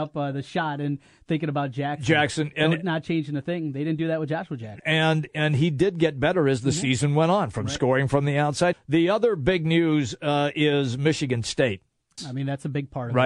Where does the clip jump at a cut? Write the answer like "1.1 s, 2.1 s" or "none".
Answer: 4.8 s, 8.7 s, 12.2 s